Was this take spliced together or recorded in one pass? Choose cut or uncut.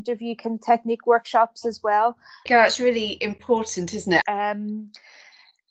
cut